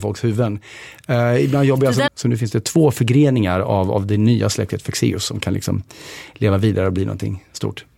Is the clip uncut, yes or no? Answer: no